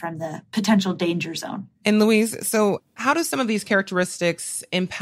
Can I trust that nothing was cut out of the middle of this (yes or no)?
no